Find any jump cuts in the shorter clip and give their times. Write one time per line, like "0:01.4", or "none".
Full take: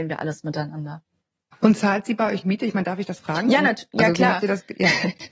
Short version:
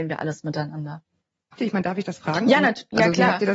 0:01.6